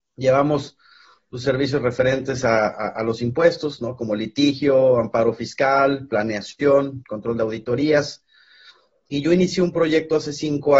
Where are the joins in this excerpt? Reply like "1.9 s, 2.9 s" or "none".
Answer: none